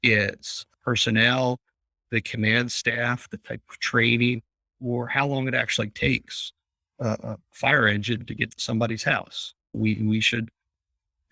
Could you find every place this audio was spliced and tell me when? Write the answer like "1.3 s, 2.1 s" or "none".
none